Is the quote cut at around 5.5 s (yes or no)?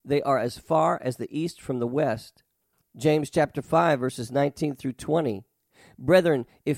no